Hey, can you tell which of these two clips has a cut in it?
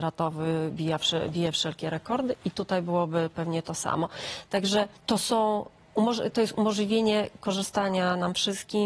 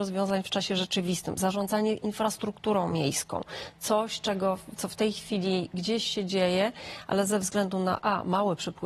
first; 1 cut; at 5.0 s

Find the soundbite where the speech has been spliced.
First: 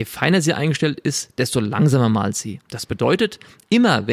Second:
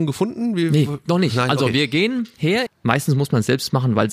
second; 1 cut; at 2.7 s

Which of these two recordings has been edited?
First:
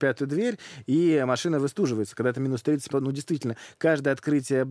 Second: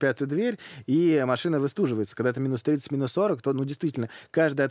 first; 1 cut; at 2.9 s

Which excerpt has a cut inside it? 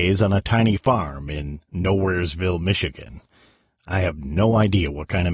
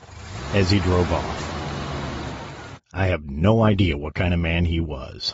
second; 1 cut; at 2.8 s

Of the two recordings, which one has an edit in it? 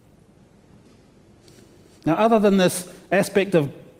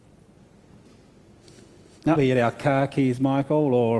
second; 1 cut; at 2.2 s

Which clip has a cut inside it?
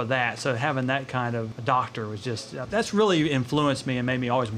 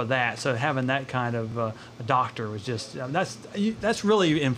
first; 2 cuts; at 1.5 s, 2.6 s

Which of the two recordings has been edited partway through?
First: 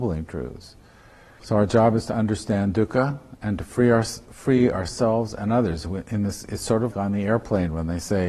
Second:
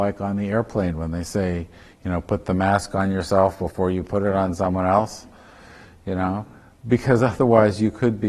first; 2 cuts; at 1.4 s, 6.9 s

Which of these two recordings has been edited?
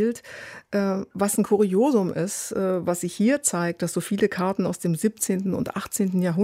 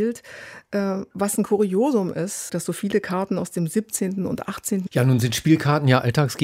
second; 2 cuts; at 2.5 s, 4.9 s

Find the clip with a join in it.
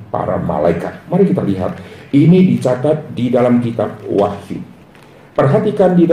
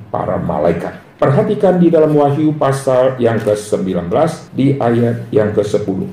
second; 2 cuts; at 1.0 s, 4.5 s

